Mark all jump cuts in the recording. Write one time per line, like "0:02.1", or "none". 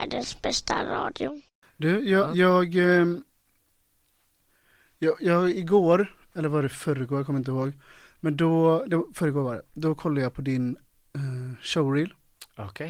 none